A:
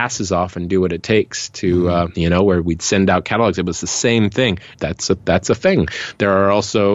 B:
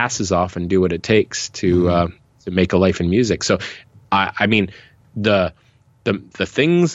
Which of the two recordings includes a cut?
A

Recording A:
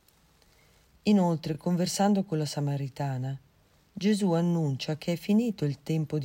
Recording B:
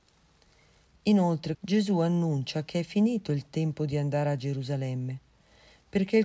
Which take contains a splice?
B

